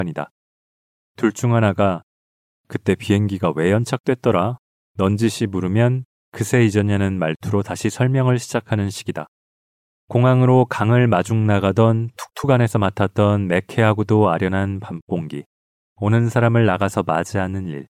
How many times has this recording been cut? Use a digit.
1